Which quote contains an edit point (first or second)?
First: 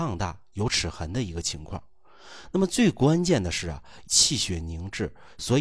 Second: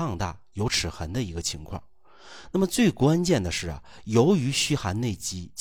first